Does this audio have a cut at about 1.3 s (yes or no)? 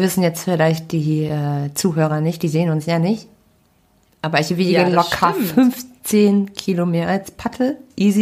no